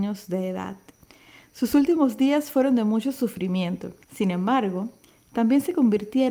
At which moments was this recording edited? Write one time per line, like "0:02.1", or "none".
0:04.0